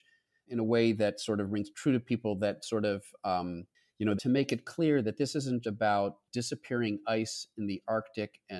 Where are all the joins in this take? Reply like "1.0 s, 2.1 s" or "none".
4.2 s, 5.6 s

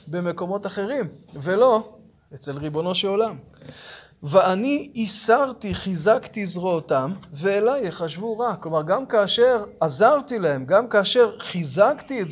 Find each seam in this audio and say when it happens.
none

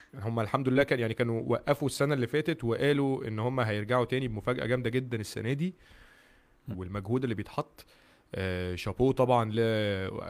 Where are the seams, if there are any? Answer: 6.7 s

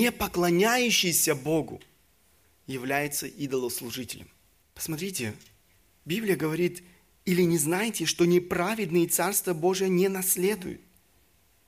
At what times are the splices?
4.6 s

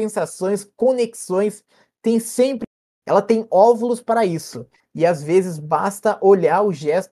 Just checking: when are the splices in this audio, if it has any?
none

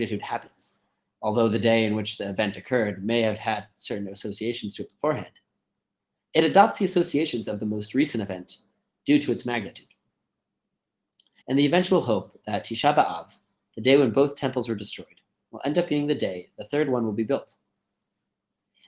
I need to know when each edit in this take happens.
11.4 s

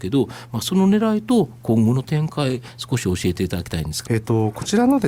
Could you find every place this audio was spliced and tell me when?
4.1 s

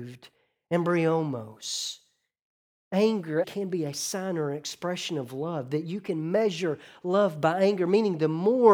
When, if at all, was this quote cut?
3.4 s

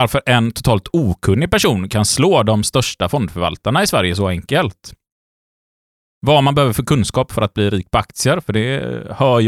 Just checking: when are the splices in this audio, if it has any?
none

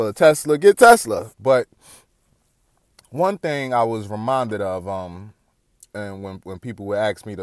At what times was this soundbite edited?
1.3 s

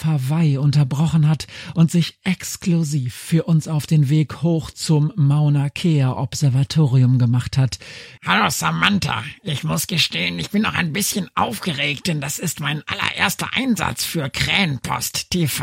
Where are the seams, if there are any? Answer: 8.2 s

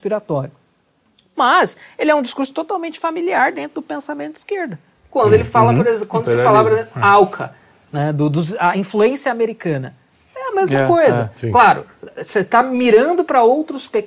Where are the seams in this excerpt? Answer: none

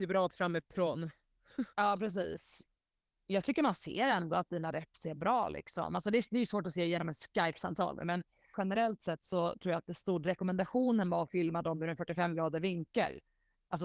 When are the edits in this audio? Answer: 8.5 s

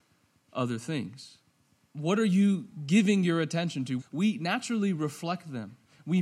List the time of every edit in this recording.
1.8 s, 4.0 s

